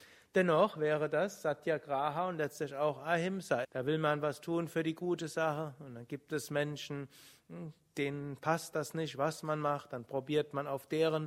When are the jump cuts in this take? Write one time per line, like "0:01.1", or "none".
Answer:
0:03.6